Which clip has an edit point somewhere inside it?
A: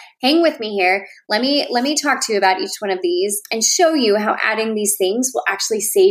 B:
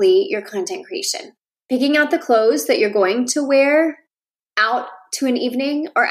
B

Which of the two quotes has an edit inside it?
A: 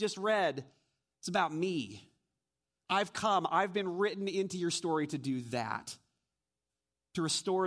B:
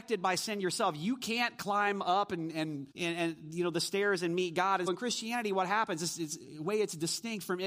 B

